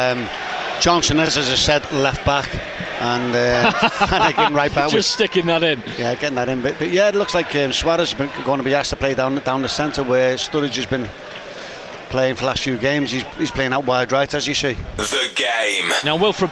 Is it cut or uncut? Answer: uncut